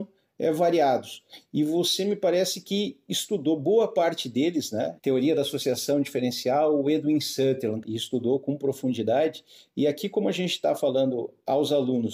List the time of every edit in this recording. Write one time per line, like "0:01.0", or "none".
0:05.0
0:07.8